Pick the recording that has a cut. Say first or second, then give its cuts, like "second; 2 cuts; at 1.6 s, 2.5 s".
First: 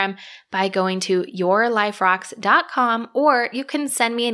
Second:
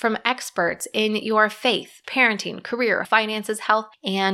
second; 2 cuts; at 2.0 s, 3.0 s